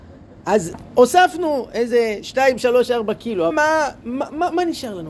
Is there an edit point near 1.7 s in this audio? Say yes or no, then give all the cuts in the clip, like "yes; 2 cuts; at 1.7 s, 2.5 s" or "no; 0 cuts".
no; 1 cut; at 3.5 s